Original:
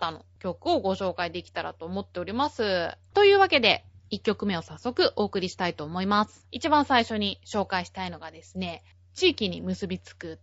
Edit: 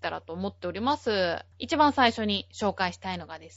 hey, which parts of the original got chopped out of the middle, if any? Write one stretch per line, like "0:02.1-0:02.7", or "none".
0:03.0-0:06.4

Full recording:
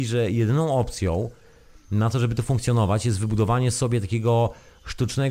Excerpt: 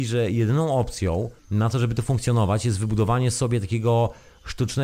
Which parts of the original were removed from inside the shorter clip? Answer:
0:01.4-0:01.8

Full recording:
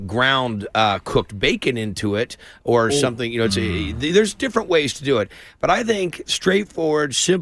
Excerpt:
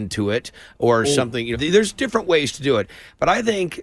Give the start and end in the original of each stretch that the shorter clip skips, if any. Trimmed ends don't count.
0:03.4-0:03.9

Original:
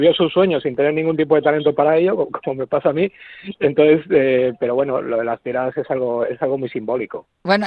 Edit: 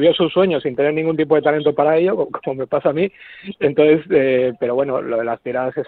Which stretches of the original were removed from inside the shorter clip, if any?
none

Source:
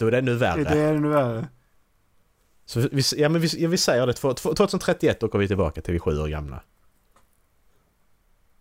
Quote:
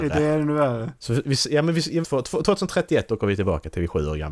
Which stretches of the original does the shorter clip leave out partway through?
0:01.5-0:02.6
0:03.7-0:04.1

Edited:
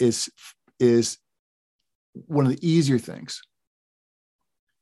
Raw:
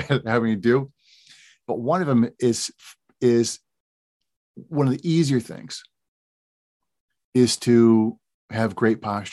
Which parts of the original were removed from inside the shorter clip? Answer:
none

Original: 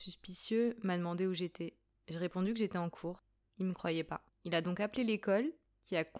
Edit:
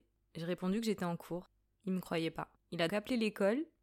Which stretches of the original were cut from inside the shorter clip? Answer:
0:04.6-0:04.8

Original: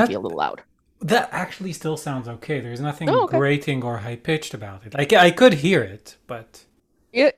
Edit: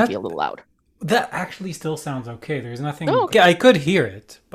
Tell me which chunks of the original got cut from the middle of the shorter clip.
0:03.3-0:05.1

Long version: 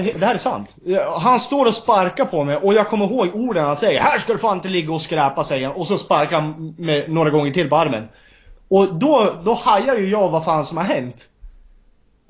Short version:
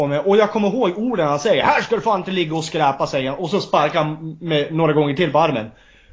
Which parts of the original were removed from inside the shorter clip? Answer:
none

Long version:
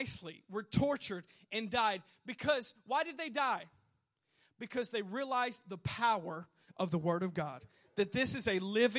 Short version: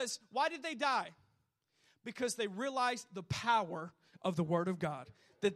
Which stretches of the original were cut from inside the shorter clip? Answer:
none

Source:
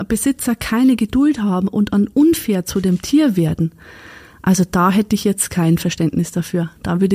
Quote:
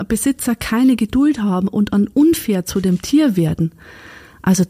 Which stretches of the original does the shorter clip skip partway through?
none

